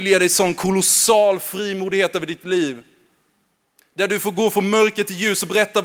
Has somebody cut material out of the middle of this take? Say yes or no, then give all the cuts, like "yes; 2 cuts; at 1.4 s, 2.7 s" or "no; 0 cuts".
no; 0 cuts